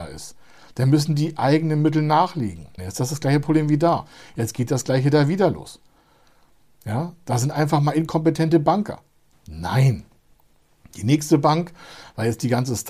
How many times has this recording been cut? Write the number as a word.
two